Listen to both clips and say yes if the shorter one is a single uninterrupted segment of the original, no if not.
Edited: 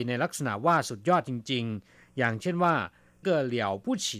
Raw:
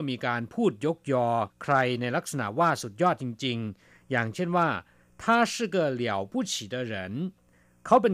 no